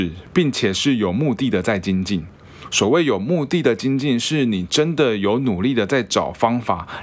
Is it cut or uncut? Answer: uncut